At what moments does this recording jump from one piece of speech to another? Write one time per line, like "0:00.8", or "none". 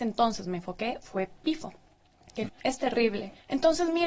0:02.5